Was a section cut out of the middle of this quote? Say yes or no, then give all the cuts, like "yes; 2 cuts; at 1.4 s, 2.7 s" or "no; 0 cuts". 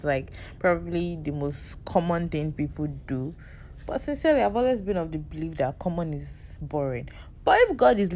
no; 0 cuts